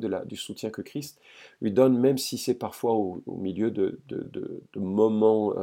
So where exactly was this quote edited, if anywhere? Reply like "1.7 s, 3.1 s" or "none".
none